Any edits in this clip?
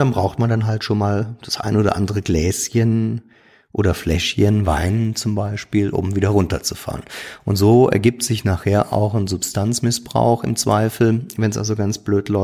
no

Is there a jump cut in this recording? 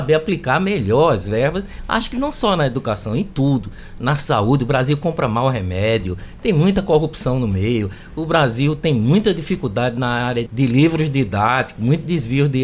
yes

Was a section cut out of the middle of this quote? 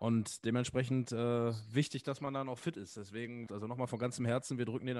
yes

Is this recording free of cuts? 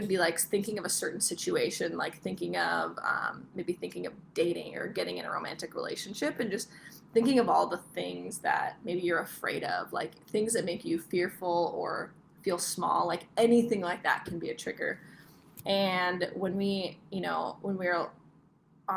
yes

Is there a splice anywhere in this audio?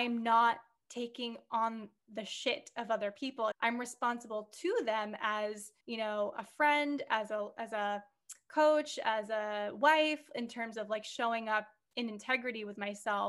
yes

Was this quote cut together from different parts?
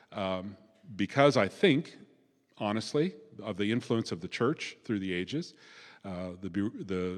no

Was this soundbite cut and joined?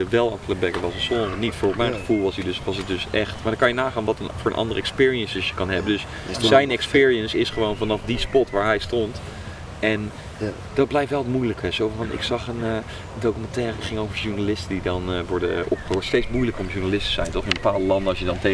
no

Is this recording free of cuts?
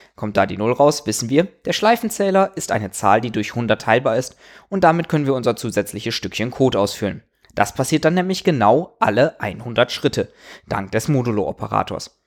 yes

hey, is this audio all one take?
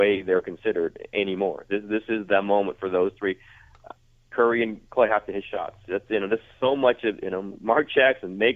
yes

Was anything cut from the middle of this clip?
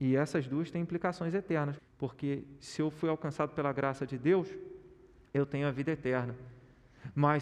yes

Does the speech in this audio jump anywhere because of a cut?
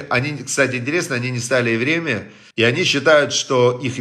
yes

